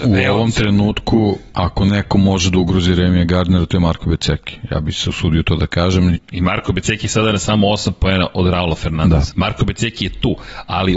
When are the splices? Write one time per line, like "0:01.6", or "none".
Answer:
0:06.2
0:09.3